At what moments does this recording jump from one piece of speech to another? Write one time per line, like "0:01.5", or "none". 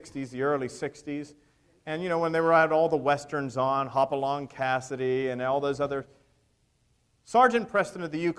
none